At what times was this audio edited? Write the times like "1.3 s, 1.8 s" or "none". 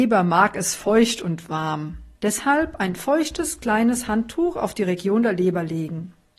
2.1 s